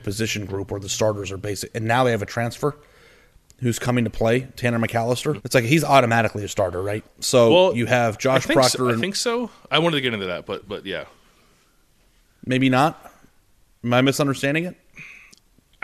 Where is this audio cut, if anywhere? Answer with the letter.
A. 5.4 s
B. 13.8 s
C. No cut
A